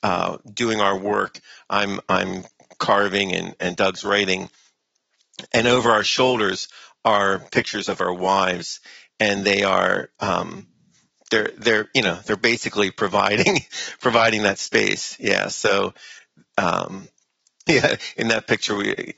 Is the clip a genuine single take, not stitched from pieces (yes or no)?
no